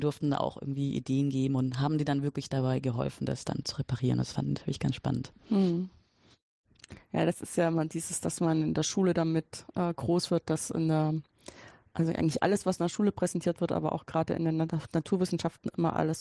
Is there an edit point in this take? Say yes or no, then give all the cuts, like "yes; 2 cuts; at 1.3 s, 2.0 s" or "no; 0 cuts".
no; 0 cuts